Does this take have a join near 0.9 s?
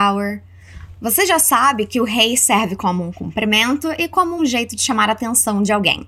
no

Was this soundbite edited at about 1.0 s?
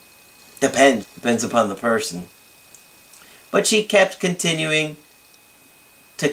yes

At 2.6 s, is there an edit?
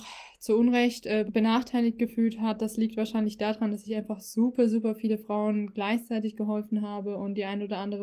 no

